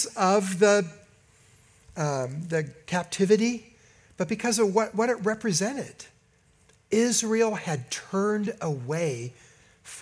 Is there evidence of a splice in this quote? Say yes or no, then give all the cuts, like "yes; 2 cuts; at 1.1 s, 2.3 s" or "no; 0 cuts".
no; 0 cuts